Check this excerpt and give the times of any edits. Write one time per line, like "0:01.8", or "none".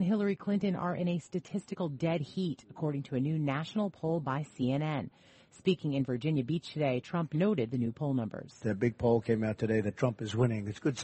none